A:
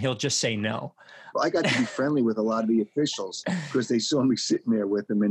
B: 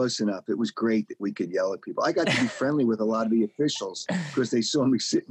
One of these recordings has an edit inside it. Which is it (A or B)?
A